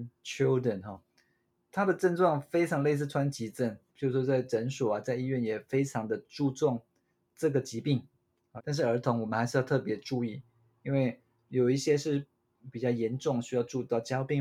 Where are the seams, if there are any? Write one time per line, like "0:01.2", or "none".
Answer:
0:03.9
0:08.6